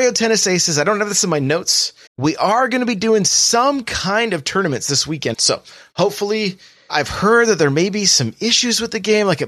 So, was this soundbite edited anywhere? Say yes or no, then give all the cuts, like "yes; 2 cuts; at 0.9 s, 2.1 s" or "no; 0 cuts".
yes; 3 cuts; at 2.1 s, 5.3 s, 6.9 s